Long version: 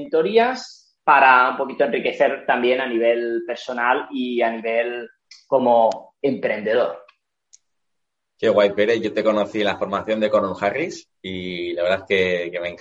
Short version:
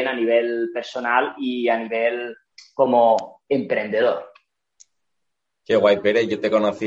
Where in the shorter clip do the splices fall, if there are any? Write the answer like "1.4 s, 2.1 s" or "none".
none

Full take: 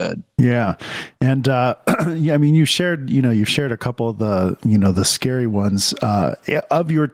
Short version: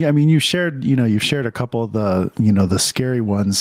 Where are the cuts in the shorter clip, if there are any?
none

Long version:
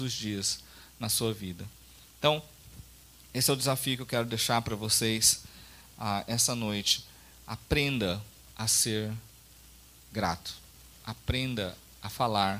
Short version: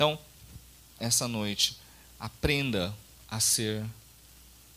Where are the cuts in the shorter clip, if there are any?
1.0 s

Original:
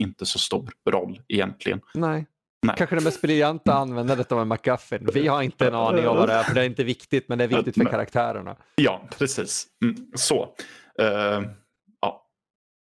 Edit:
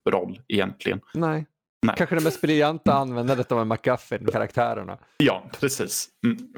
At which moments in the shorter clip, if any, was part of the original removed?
4.3 s

